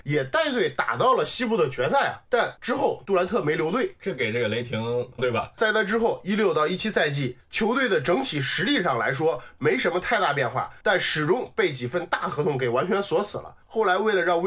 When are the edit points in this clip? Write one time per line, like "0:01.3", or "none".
0:05.2

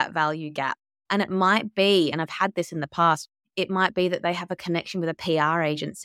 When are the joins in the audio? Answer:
none

